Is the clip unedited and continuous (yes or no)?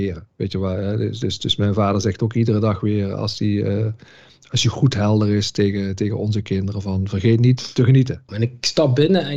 no